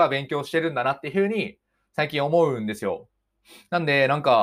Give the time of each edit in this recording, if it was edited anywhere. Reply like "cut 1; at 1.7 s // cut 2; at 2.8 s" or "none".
none